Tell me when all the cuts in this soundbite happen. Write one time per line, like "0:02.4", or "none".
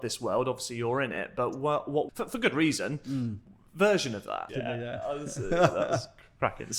0:02.1
0:04.5